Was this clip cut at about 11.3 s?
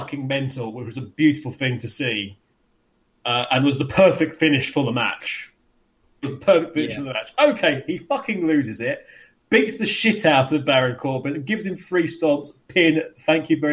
no; 1 cut; at 6.2 s

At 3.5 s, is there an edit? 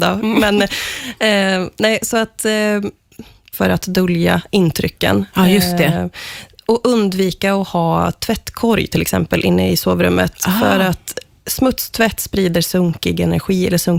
yes; 1 cut; at 3.5 s

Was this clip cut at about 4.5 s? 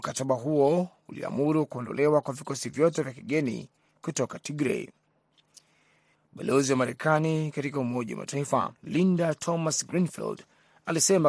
no; 2 cuts; at 6.1 s, 8.8 s

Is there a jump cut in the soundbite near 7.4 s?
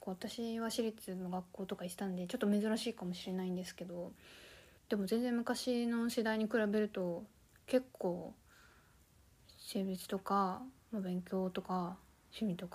no; 1 cut; at 4.8 s

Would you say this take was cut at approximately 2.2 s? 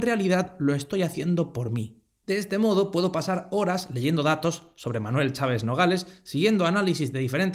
yes; 1 cut; at 2.2 s

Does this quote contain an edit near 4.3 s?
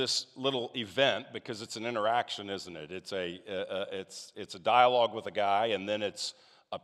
yes; 1 cut; at 4.3 s

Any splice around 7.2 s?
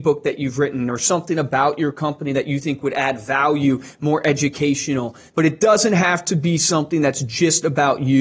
no; 1 cut; at 5.3 s

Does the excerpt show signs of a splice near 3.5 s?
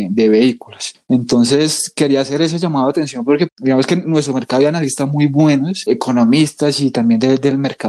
yes; 1 cut; at 3.5 s

